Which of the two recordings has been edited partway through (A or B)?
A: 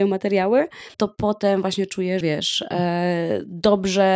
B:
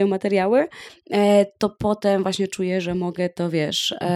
A